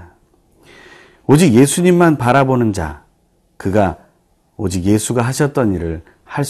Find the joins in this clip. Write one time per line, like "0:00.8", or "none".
none